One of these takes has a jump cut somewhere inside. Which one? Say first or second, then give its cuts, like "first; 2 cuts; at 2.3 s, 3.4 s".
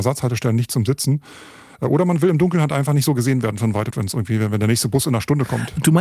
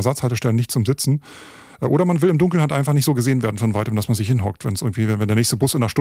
first; 1 cut; at 3.9 s